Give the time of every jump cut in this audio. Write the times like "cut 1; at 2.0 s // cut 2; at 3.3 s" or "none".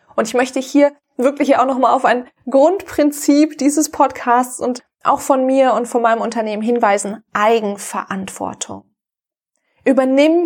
none

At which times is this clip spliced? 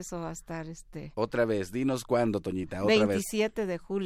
none

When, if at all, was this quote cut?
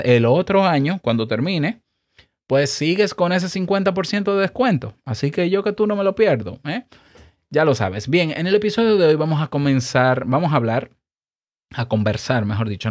none

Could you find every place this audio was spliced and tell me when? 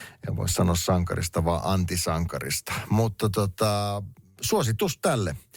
none

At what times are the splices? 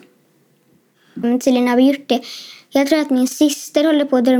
cut 1; at 1.2 s

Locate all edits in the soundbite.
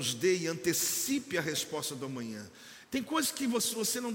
cut 1; at 2.8 s

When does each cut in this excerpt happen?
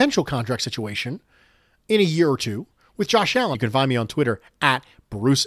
cut 1; at 3.5 s

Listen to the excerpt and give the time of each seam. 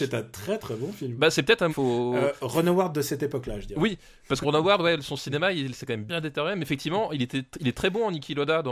cut 1; at 1.7 s // cut 2; at 4.4 s // cut 3; at 6.1 s

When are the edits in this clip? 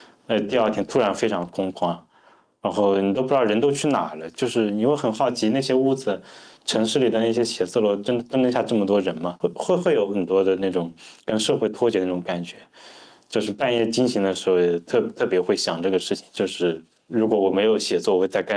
none

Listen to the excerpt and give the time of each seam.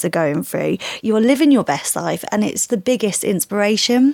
cut 1; at 1.0 s // cut 2; at 2.7 s

